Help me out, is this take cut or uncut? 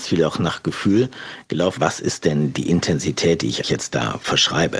cut